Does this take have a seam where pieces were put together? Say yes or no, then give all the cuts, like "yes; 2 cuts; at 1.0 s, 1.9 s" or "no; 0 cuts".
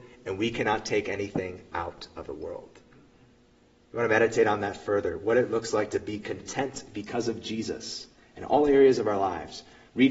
no; 0 cuts